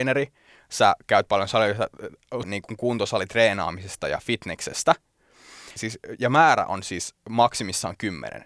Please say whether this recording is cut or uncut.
cut